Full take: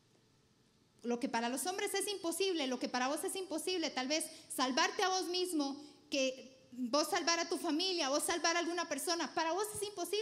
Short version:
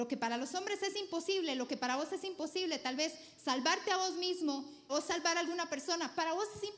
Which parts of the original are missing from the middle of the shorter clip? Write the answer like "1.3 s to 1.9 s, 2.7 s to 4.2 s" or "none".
6.0 s to 8.1 s